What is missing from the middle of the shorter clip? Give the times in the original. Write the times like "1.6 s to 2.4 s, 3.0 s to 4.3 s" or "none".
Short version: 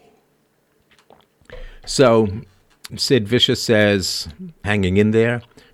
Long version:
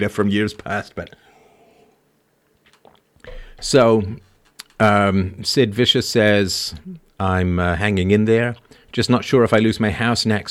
4.6 s to 5.4 s, 7.1 s to 7.8 s